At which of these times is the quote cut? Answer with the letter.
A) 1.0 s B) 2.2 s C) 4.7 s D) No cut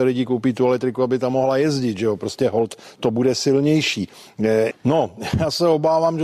C